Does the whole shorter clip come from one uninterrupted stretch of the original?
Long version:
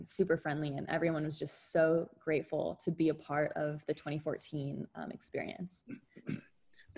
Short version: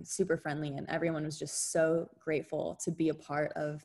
yes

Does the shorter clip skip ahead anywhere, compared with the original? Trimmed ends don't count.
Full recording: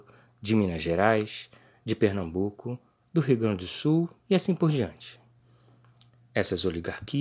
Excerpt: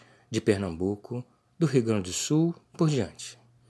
yes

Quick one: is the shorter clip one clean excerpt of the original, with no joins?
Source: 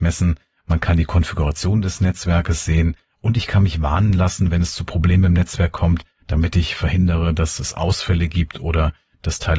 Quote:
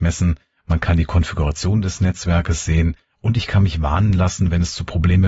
yes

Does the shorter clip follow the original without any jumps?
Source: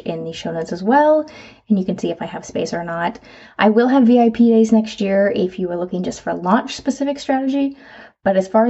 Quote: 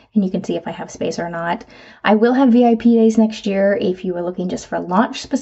yes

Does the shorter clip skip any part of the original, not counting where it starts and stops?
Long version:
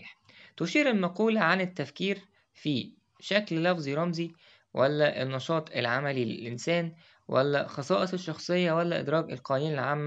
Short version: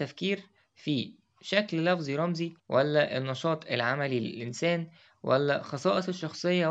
yes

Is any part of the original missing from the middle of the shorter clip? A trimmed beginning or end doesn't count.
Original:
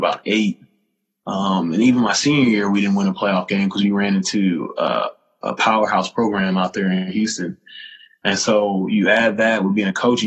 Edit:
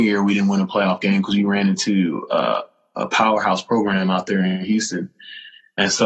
no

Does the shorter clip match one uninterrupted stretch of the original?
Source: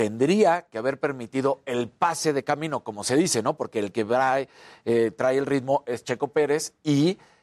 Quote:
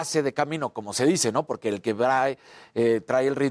yes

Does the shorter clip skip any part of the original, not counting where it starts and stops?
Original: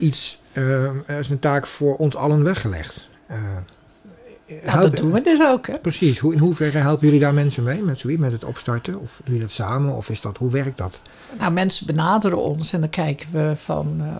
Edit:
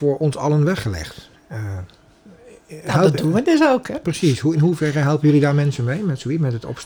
no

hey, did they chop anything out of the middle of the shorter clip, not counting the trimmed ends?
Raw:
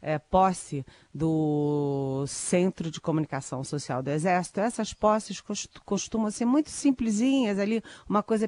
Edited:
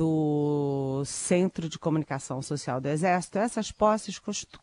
no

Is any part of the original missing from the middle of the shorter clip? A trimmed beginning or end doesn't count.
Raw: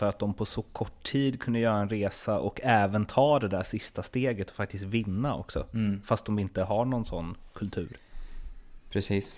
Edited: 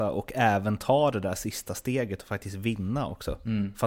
no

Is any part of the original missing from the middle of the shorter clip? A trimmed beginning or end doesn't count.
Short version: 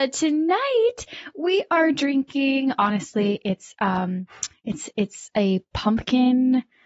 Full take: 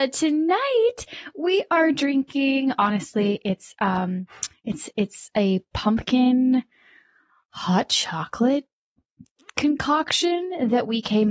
no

